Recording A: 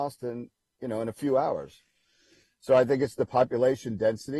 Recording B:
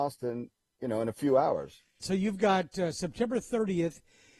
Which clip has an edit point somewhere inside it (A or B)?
B